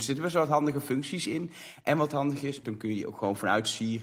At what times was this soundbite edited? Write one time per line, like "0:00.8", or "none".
0:02.6